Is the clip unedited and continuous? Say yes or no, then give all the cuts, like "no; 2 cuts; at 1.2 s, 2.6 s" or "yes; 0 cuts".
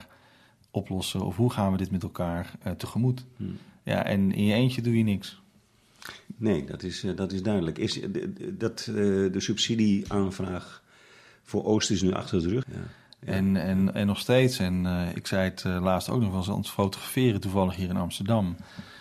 no; 1 cut; at 12.6 s